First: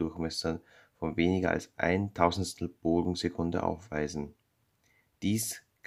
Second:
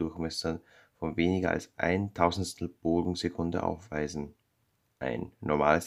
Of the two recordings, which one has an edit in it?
second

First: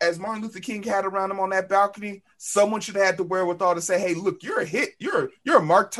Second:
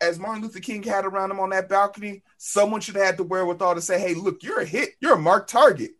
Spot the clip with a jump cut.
second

